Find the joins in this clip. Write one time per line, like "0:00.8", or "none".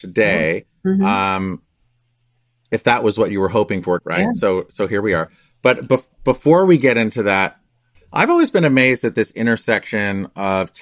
0:04.0
0:07.9